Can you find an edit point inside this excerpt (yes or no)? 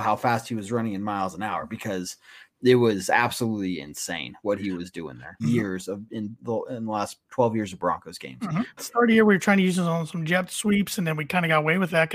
yes